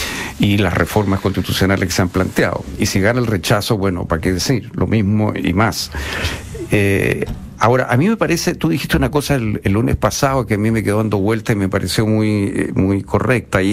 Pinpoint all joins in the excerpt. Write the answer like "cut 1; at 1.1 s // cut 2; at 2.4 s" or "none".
none